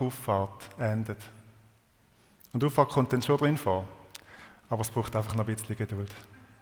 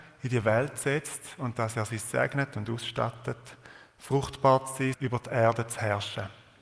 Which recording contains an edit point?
second; 1 cut; at 4.9 s

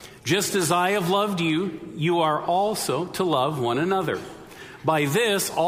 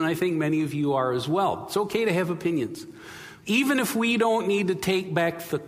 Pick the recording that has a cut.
second; 1 cut; at 3.4 s

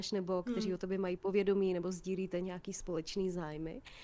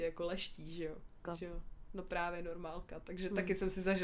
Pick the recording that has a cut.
second; 1 cut; at 1.2 s

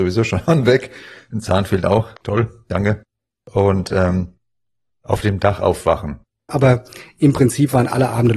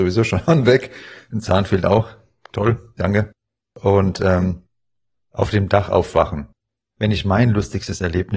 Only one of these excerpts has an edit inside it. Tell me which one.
first; 2 cuts; at 2.2 s, 6.5 s

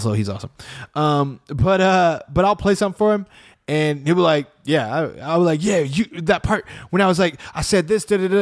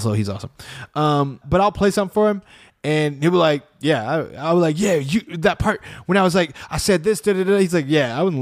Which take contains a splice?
second; 1 cut; at 1.4 s

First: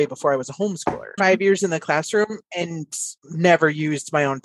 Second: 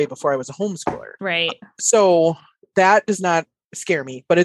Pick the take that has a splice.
first; 1 cut; at 1.2 s

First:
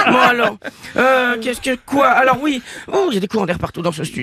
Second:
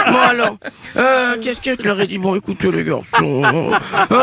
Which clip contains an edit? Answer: second; 1 cut; at 1.8 s

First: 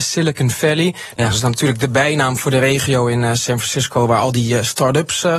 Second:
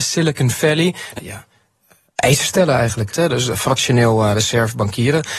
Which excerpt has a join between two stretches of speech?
second; 2 cuts; at 1.2 s, 3.1 s

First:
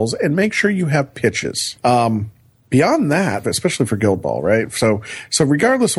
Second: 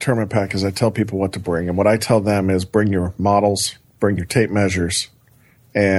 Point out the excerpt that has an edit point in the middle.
first; 2 cuts; at 1.8 s, 3.4 s

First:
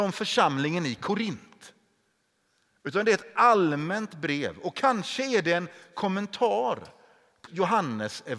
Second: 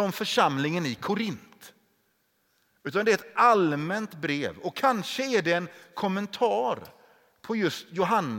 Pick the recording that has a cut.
first; 1 cut; at 7.5 s

